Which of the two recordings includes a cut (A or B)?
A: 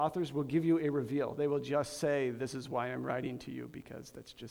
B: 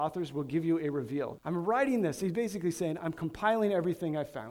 B